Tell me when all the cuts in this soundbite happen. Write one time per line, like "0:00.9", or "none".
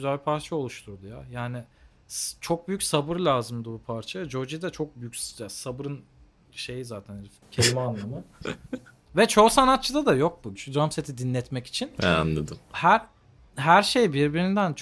0:10.6